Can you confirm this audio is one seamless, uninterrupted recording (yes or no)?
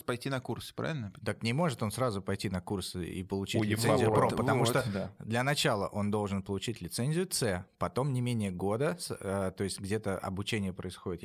yes